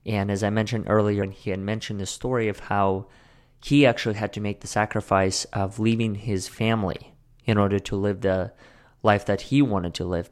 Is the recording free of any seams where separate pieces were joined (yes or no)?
no